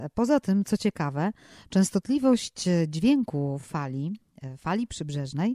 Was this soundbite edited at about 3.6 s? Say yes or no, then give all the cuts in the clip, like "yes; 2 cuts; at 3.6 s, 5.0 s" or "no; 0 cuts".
no; 0 cuts